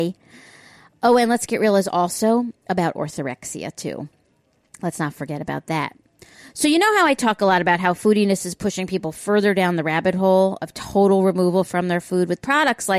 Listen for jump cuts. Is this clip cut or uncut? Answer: uncut